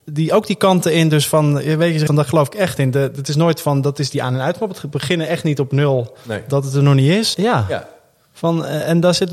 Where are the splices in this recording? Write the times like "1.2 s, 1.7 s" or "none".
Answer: 2.1 s, 7.3 s